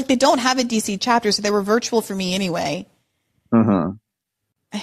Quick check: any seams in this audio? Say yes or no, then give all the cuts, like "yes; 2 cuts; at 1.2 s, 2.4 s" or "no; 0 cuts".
no; 0 cuts